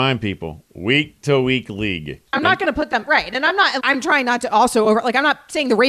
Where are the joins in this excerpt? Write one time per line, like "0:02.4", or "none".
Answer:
0:02.3
0:03.8